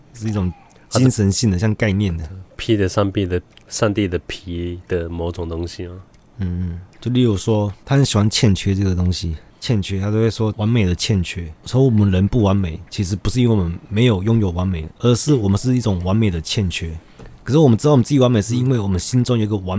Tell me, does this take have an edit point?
yes; 1 cut; at 6.9 s

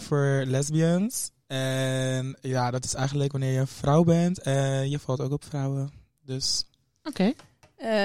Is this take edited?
no; 0 cuts

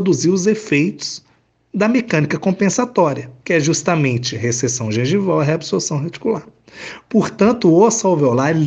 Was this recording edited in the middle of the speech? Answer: yes; 1 cut; at 3.4 s

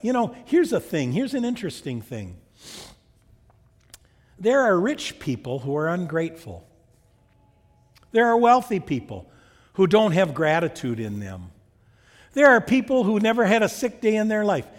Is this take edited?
no; 0 cuts

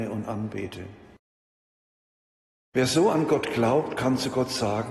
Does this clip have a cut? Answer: no; 0 cuts

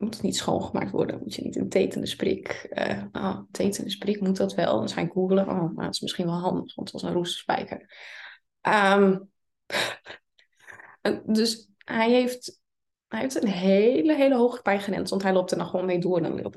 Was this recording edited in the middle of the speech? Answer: no; 0 cuts

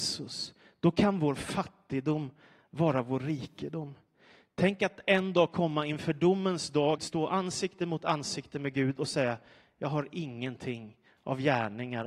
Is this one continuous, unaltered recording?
no; 1 cut; at 7.0 s

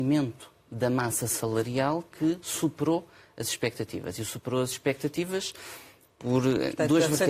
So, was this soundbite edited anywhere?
no; 0 cuts

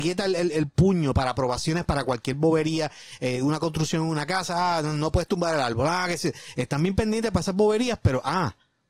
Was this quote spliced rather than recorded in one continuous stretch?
no; 0 cuts

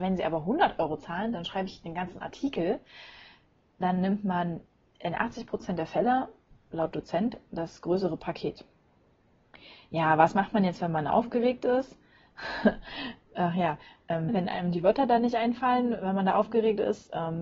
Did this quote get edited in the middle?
yes; 1 cut; at 14.3 s

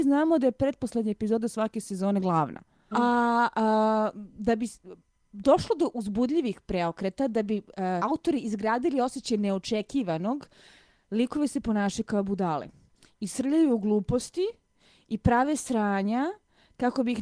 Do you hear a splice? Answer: yes; 2 cuts; at 2.9 s, 8.0 s

